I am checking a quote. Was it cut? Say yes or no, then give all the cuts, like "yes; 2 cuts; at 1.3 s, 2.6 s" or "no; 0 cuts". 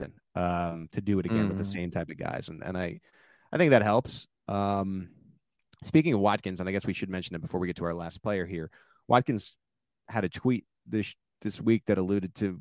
no; 0 cuts